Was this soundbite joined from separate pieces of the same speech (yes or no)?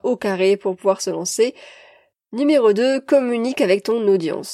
yes